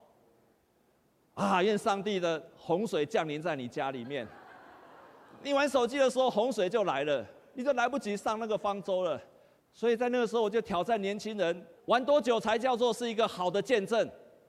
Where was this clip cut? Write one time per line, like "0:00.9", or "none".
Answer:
0:09.6
0:11.8